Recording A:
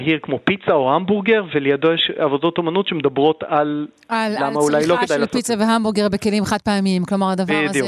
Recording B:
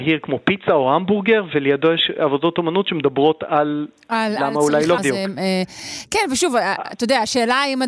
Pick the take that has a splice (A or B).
B